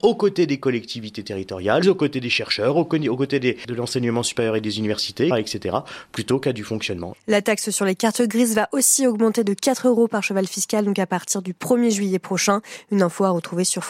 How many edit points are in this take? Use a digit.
3